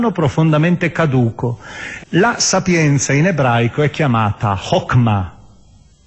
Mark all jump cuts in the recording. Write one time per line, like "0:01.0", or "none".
0:02.0